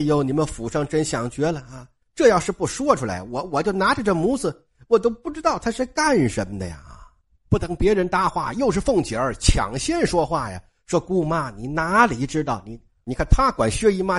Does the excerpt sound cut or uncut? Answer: cut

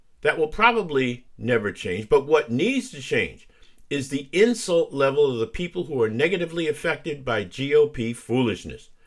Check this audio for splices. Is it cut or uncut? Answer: uncut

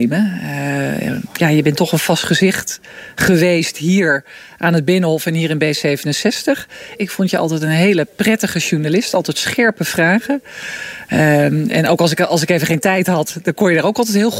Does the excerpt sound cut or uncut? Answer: cut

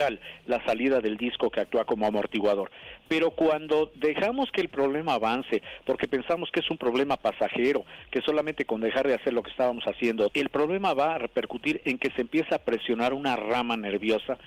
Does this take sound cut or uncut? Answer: cut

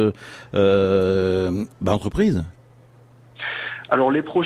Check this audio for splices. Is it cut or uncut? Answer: uncut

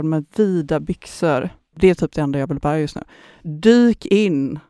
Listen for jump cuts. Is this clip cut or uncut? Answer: uncut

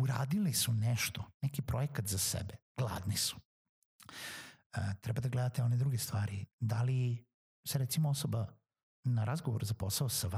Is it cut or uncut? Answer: uncut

